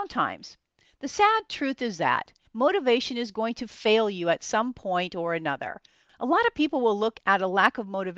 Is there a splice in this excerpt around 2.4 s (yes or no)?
yes